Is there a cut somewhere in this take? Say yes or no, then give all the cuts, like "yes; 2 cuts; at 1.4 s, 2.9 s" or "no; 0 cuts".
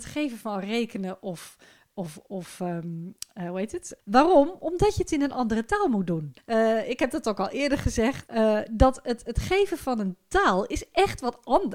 yes; 3 cuts; at 4.0 s, 6.4 s, 8.3 s